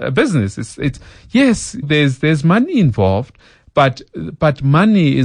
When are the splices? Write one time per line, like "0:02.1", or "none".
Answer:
0:01.8

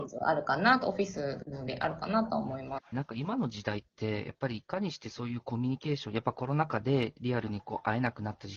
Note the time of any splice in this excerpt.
0:02.9

